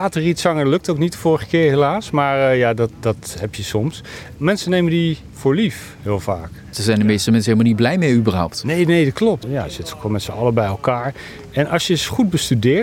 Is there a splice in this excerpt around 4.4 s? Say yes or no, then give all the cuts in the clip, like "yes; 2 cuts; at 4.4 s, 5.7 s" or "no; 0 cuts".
yes; 3 cuts; at 4.4 s, 6.7 s, 9.4 s